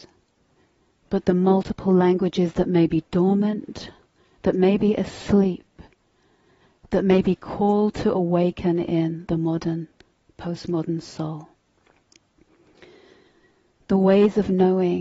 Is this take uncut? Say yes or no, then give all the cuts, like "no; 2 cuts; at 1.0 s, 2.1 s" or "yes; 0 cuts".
yes; 0 cuts